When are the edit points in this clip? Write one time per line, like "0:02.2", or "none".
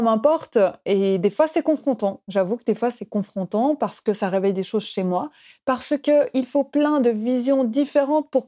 0:05.5